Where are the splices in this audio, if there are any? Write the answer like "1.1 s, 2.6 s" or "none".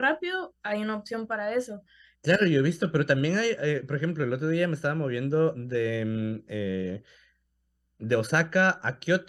2.1 s